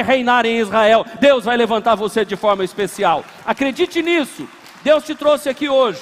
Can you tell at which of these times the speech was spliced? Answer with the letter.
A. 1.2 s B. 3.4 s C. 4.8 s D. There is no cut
D